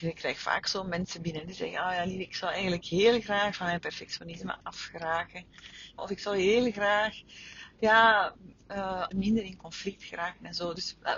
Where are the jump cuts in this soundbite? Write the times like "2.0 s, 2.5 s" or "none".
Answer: 6.0 s, 9.1 s